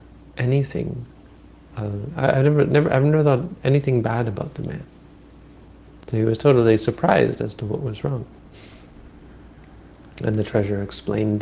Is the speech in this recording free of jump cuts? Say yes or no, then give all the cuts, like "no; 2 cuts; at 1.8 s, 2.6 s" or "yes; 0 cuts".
yes; 0 cuts